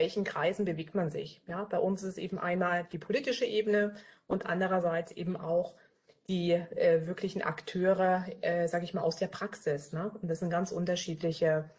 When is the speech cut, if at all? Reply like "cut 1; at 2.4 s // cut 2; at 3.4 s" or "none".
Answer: none